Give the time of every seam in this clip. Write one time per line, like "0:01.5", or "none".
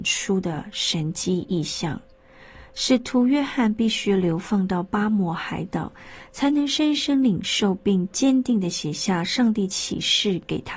none